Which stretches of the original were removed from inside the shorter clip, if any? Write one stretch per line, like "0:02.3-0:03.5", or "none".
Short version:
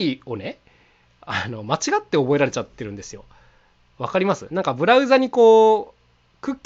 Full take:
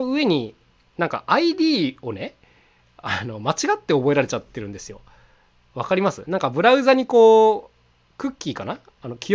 none